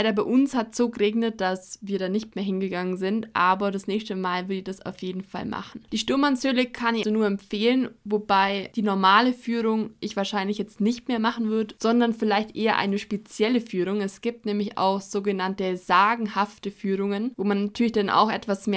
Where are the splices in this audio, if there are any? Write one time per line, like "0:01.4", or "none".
0:07.0